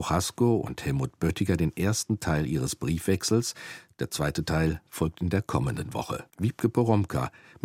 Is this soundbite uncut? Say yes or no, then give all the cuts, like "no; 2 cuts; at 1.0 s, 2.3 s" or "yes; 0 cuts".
no; 1 cut; at 6.3 s